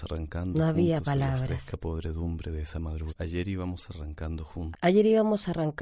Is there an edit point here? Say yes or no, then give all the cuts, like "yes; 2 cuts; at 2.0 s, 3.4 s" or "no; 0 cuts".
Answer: yes; 2 cuts; at 3.1 s, 4.7 s